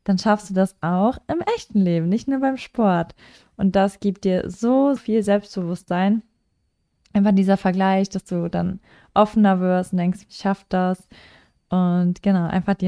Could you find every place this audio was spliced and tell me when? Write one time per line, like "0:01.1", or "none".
0:05.0
0:10.3